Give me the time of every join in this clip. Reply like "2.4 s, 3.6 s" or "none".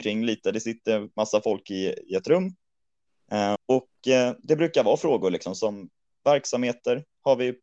3.6 s

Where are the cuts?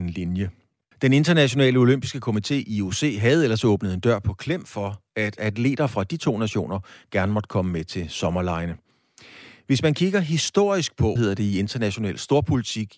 0.9 s, 11.2 s

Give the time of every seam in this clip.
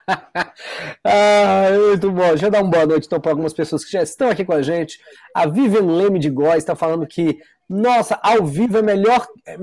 none

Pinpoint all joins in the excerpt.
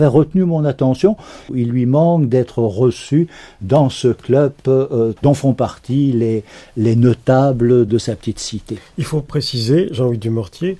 1.5 s, 5.2 s

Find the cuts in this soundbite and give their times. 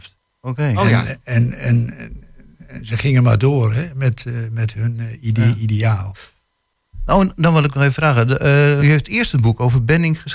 8.8 s

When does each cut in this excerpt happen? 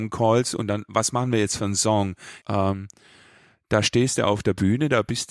2.4 s

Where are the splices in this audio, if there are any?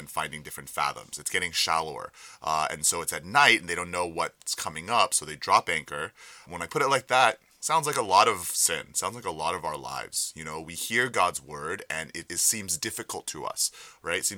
6.4 s, 12.3 s

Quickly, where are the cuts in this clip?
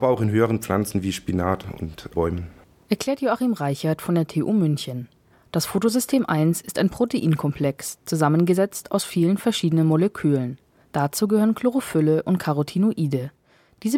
none

